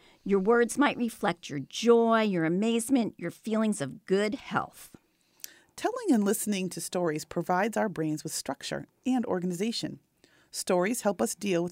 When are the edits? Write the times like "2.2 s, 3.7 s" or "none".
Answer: none